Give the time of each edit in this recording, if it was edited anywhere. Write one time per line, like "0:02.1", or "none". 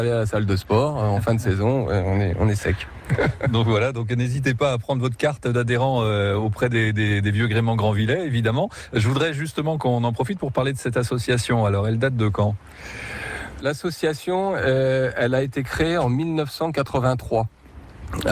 0:13.6

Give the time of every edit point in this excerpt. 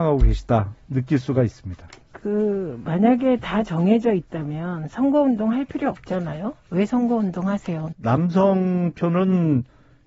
0:07.9

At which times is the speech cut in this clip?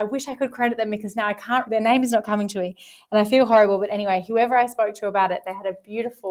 0:01.7

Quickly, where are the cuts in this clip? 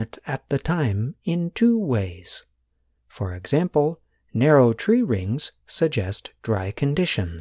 0:02.9

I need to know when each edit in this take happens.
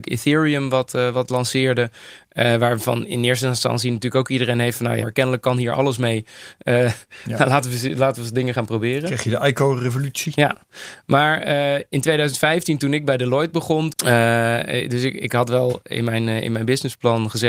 0:05.0
0:13.9

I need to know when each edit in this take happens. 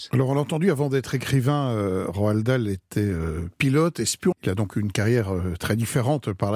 0:04.3

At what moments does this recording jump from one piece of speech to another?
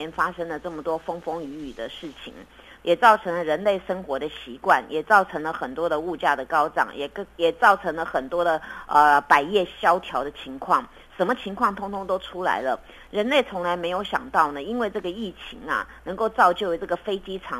0:02.8

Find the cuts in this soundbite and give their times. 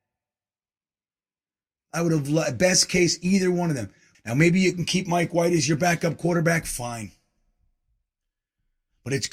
0:04.1

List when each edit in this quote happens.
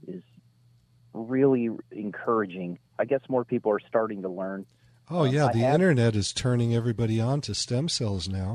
0:02.9

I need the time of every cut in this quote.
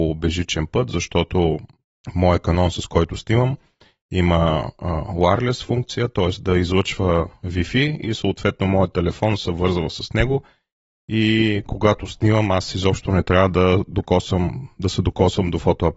none

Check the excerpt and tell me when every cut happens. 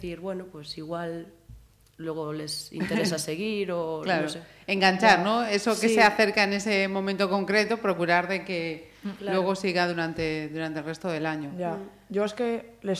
none

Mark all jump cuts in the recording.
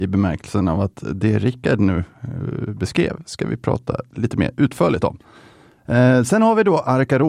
none

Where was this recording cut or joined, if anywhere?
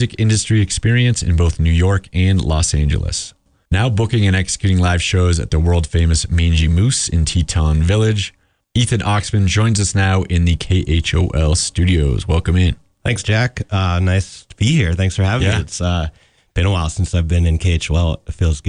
none

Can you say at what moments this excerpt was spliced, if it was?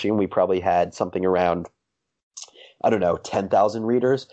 none

